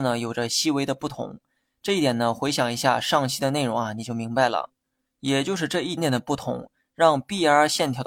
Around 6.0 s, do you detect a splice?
yes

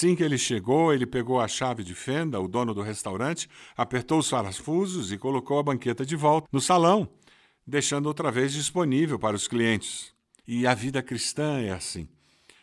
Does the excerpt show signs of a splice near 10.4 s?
yes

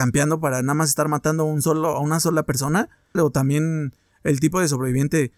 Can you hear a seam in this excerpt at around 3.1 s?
yes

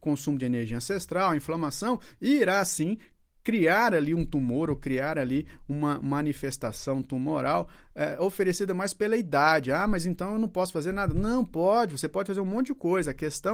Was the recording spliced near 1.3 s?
no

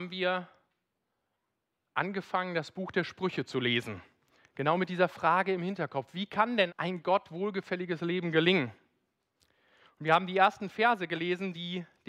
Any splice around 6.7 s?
yes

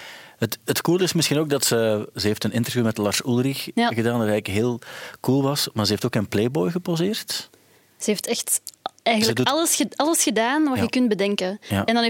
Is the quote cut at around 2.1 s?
yes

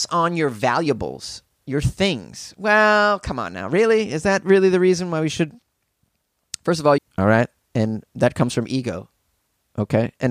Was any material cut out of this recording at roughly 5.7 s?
no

